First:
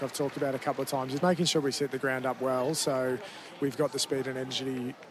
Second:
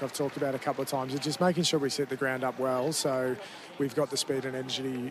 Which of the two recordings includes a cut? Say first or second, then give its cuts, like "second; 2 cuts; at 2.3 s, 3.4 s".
first; 1 cut; at 1.2 s